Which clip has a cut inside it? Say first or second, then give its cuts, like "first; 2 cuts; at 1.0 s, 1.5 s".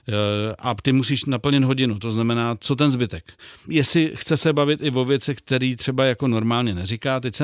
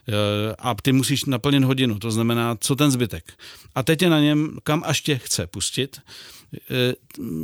first; 1 cut; at 3.7 s